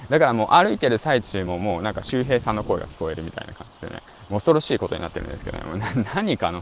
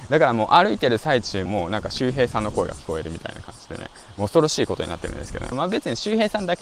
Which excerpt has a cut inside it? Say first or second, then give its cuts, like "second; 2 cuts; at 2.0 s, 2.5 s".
second; 2 cuts; at 1.5 s, 5.5 s